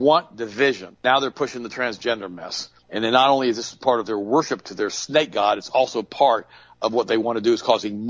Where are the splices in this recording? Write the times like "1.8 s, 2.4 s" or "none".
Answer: 1.0 s, 2.8 s